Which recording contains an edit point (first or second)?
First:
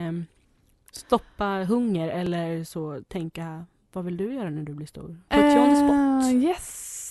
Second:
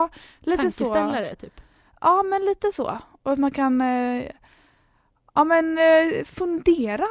first